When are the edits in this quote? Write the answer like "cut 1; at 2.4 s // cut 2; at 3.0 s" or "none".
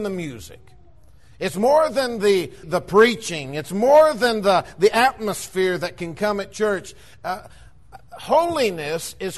cut 1; at 2.6 s